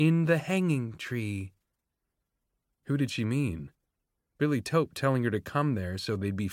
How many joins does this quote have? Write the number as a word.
zero